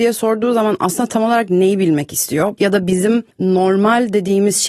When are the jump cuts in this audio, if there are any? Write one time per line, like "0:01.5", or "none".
0:02.6